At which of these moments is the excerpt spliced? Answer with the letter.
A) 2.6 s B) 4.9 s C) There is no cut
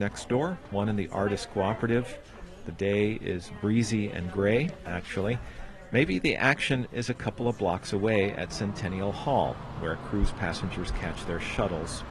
B